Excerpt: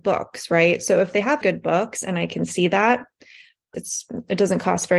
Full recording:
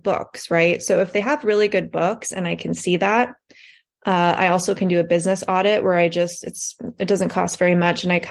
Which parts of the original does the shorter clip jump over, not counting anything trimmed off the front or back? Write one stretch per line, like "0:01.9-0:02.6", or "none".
0:01.4-0:01.7
0:04.0-0:06.4